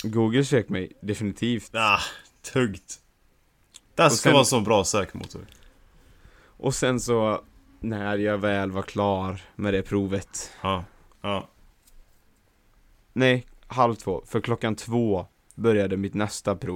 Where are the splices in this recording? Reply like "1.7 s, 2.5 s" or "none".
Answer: 11.1 s